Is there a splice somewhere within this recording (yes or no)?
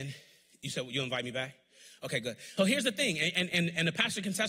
yes